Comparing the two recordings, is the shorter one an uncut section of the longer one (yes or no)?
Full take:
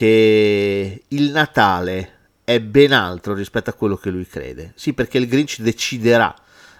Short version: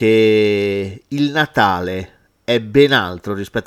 yes